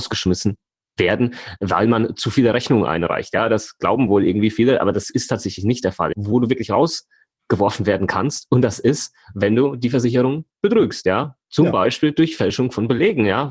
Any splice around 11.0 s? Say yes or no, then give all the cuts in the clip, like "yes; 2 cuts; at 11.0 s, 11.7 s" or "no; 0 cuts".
no; 1 cut; at 6.1 s